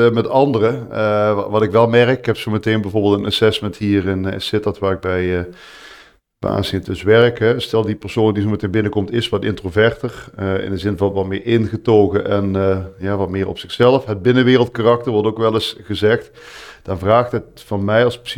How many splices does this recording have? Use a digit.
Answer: 1